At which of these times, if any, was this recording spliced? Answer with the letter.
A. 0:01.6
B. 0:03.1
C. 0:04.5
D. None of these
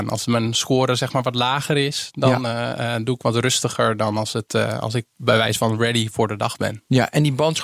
D